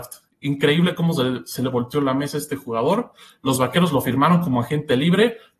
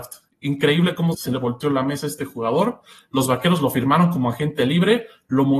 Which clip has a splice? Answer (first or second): second